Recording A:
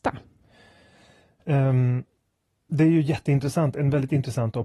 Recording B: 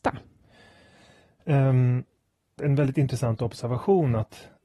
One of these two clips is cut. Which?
B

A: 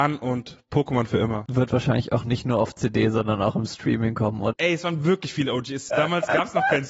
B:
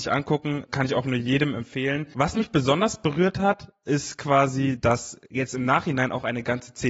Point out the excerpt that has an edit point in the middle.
A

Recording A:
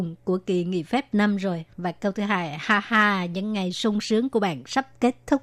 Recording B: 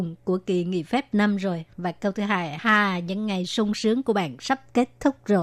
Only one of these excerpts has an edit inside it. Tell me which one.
B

